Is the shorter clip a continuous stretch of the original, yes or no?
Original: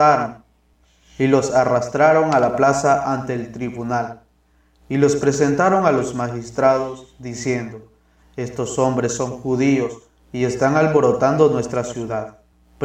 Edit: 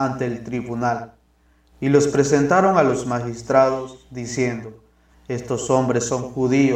yes